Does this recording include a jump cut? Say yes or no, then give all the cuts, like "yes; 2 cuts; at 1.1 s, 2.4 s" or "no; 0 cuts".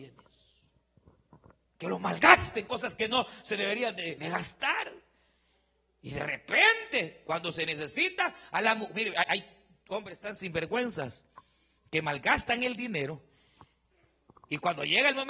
yes; 1 cut; at 4.2 s